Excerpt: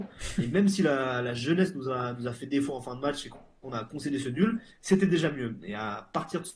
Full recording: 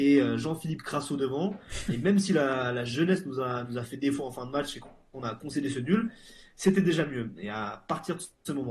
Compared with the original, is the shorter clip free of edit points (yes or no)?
no